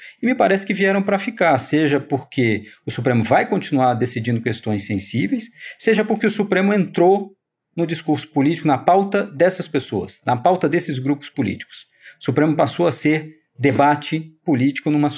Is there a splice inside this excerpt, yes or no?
no